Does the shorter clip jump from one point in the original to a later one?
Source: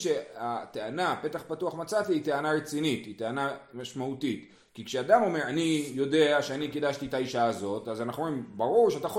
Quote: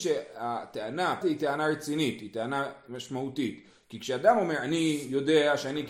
yes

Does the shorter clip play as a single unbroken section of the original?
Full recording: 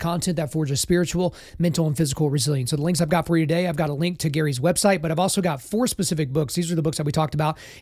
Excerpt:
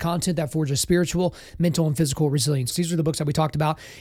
no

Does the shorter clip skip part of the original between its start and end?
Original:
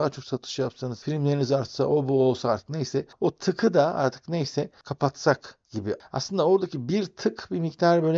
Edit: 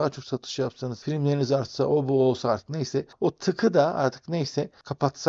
no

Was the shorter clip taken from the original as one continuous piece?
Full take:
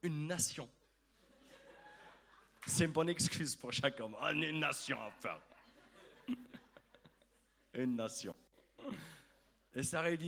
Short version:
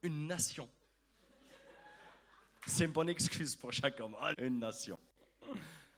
no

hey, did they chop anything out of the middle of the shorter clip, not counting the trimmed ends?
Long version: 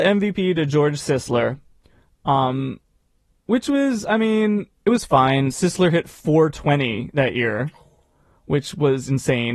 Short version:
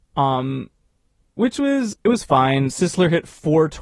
yes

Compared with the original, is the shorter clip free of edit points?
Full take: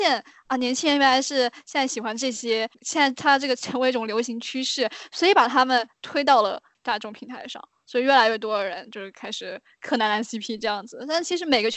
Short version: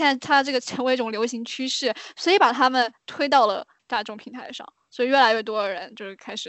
yes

